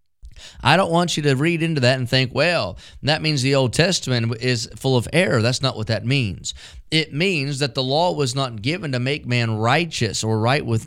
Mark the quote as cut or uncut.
uncut